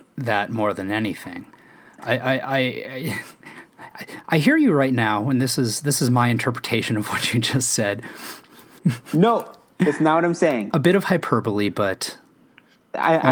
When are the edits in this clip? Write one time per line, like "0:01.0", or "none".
0:08.8